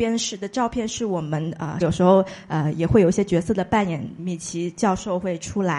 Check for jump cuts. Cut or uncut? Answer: cut